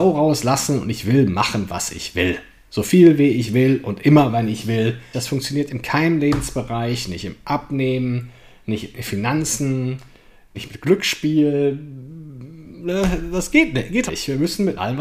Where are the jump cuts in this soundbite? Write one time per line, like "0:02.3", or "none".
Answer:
0:05.1
0:10.5
0:14.1